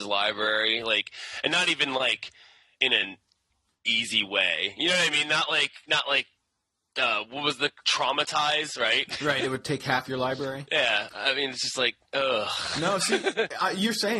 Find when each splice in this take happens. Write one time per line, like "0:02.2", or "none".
none

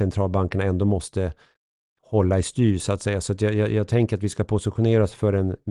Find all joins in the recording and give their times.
none

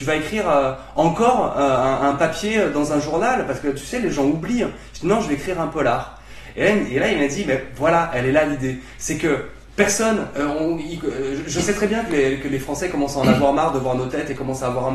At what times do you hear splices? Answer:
none

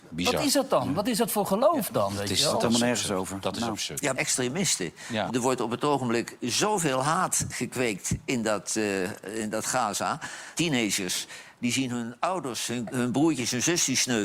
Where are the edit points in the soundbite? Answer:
0:04.1
0:05.3
0:10.5

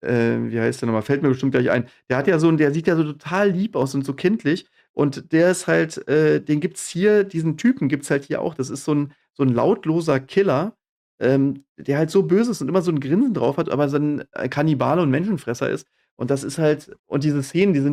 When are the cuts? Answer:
0:17.0

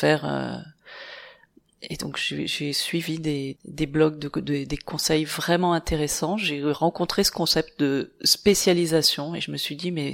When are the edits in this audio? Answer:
0:03.6

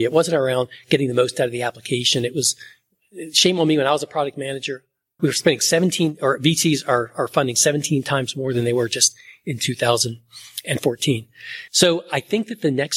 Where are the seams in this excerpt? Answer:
0:05.2
0:11.7

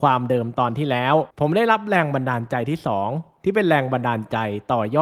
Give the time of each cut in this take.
0:01.3

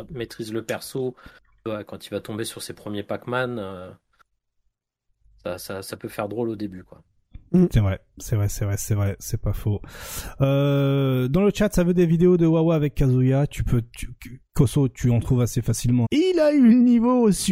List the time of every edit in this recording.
0:16.0

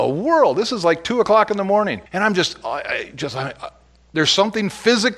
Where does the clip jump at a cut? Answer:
0:02.1

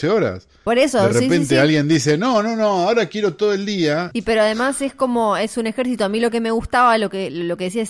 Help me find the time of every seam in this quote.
0:04.1

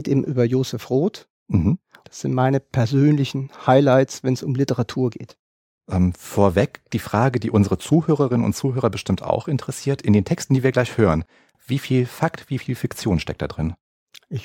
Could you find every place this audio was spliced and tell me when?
0:02.0

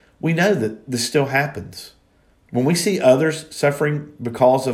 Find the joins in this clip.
0:02.3

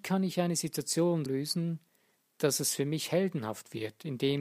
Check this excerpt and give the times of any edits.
0:01.3

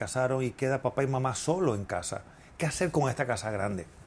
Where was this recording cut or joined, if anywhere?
none

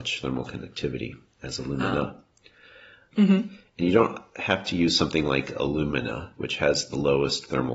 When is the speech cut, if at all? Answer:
0:03.1
0:06.4

